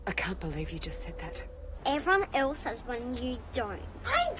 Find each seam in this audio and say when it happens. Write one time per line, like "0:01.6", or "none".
0:01.8